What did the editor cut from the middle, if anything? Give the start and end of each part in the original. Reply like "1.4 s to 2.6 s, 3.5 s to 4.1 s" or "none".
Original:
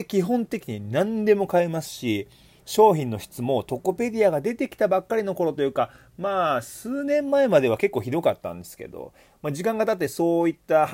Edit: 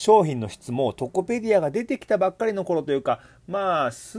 none